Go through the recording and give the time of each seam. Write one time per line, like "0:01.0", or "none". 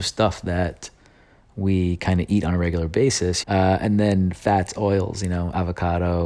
0:03.4